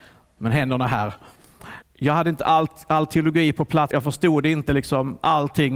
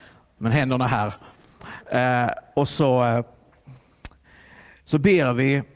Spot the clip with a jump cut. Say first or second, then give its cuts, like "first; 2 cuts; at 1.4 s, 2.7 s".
first; 2 cuts; at 1.8 s, 3.9 s